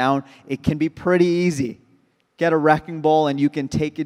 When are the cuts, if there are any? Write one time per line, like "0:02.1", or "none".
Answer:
none